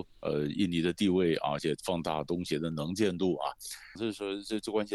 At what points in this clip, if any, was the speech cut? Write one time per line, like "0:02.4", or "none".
0:04.0